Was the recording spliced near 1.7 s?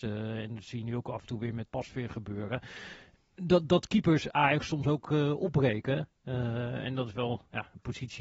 yes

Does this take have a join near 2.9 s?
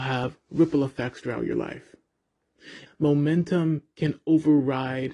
yes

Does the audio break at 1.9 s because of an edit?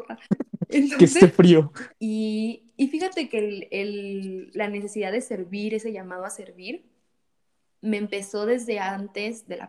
yes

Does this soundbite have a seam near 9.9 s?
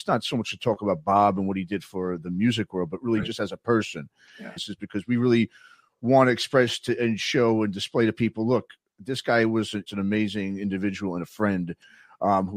yes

